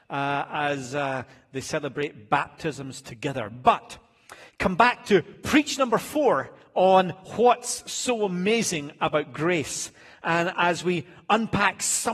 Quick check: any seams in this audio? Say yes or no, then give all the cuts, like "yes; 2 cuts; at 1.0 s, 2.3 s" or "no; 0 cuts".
no; 0 cuts